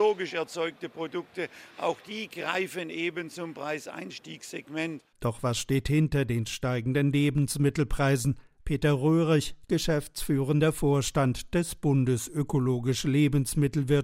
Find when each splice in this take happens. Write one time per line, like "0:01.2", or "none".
0:08.6